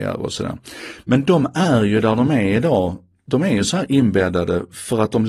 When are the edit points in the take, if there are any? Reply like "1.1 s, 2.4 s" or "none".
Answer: none